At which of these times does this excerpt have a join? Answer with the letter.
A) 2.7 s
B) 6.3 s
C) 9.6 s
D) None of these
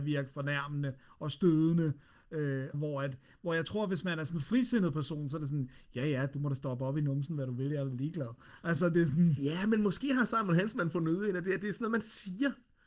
A